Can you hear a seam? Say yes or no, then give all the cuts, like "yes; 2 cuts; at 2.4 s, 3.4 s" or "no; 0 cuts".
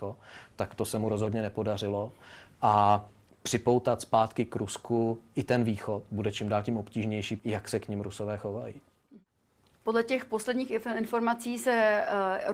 yes; 1 cut; at 7.4 s